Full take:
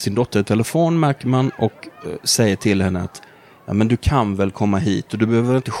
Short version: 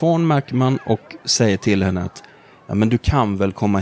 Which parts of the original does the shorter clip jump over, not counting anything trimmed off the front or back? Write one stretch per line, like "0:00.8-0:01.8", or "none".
0:01.9-0:02.2